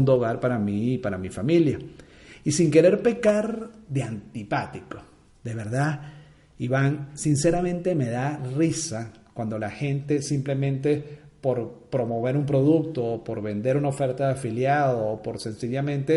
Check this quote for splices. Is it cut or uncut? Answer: uncut